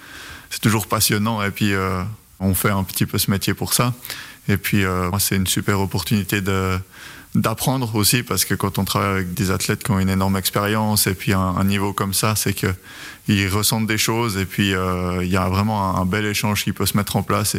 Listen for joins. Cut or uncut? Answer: cut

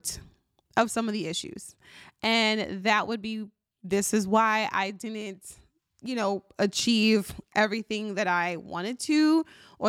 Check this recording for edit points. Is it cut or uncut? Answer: uncut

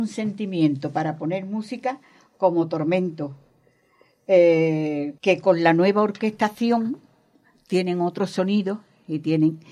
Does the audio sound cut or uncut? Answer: cut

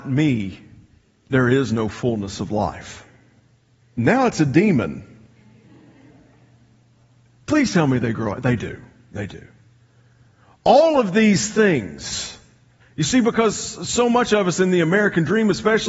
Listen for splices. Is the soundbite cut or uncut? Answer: cut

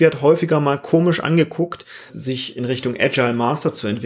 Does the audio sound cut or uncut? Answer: cut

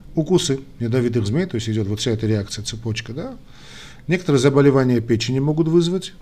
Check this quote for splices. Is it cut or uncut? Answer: uncut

